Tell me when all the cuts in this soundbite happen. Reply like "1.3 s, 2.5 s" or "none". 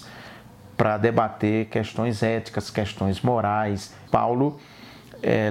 4.1 s